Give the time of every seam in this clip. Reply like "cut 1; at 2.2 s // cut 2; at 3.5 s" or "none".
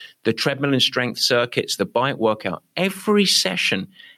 cut 1; at 1.8 s